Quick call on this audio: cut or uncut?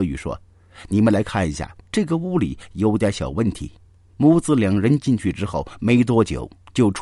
uncut